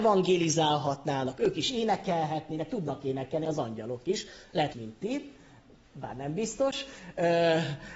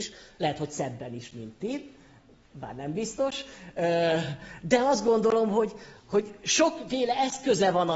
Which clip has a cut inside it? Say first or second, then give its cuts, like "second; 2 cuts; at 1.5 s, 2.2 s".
first; 1 cut; at 4.7 s